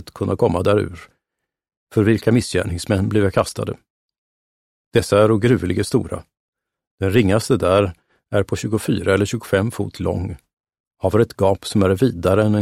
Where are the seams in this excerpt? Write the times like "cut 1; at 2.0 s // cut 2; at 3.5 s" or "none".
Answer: none

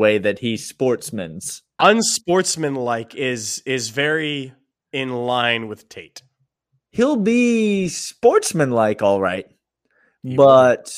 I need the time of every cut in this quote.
cut 1; at 1.8 s

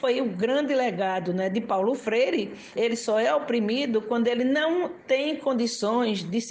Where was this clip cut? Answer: cut 1; at 2.8 s

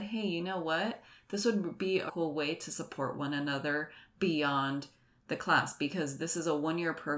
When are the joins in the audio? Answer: cut 1; at 2.1 s

